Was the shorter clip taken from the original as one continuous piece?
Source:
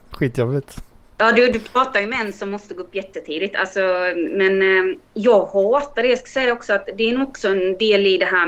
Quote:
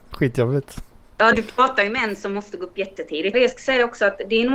no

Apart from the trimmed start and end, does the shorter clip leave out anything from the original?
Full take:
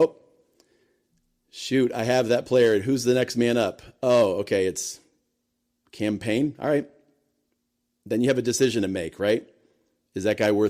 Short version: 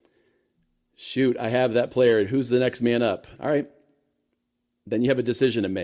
yes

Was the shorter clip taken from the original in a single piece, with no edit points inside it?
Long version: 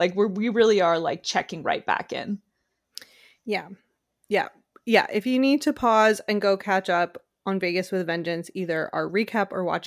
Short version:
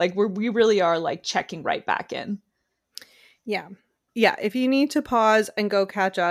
no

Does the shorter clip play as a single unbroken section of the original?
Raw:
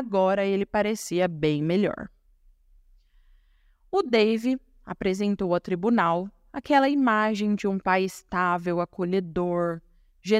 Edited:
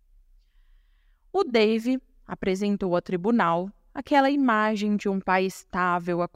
yes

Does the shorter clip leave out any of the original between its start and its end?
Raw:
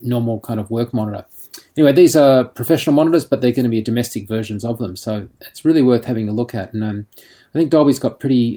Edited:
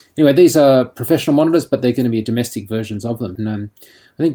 yes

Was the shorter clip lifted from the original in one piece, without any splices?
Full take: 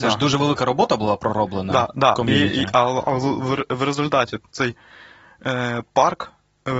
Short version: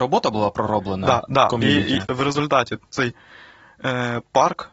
no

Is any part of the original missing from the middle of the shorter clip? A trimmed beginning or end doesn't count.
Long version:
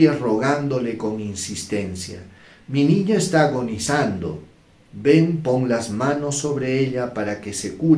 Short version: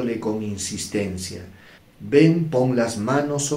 yes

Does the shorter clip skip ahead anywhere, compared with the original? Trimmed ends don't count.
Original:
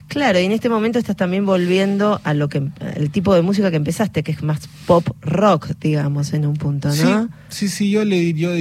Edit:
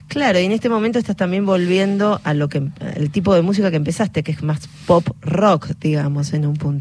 no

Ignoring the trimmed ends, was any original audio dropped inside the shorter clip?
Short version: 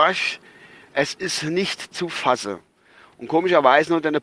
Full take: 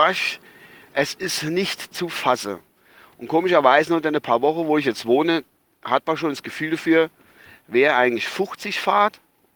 no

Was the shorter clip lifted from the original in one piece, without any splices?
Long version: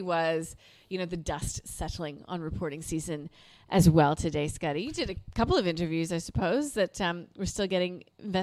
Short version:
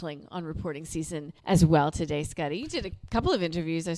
no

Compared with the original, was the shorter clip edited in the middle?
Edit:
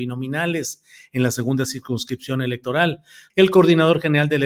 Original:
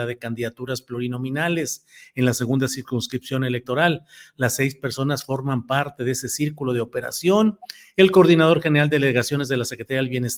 yes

